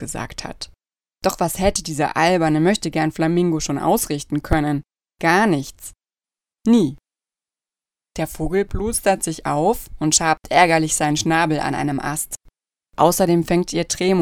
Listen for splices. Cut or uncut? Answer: cut